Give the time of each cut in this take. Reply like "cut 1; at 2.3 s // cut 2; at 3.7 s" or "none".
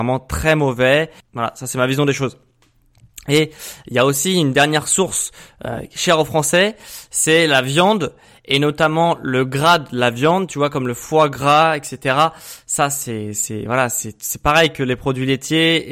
cut 1; at 1.2 s